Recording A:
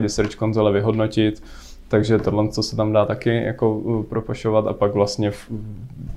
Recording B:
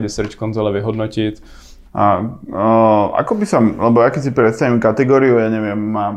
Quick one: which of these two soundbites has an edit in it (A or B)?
B